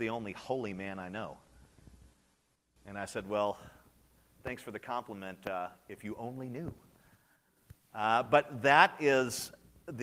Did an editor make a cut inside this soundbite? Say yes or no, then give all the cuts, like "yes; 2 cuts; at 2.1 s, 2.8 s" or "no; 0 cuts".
no; 0 cuts